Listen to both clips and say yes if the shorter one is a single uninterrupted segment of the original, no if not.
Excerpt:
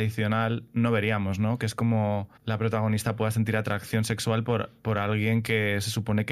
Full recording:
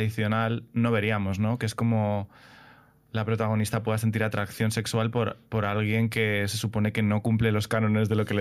no